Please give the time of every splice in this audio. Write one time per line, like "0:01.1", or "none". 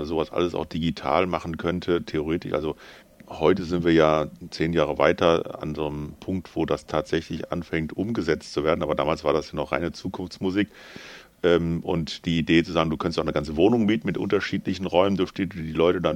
none